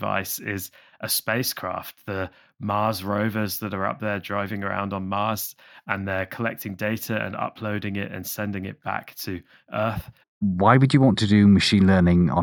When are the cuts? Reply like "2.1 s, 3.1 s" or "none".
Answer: 10.2 s